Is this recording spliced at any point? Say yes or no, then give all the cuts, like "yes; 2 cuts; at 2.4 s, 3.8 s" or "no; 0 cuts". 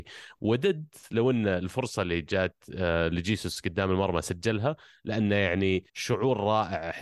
yes; 1 cut; at 5.9 s